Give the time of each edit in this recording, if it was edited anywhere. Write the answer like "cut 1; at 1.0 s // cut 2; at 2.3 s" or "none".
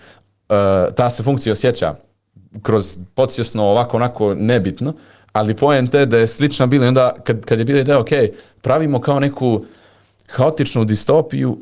none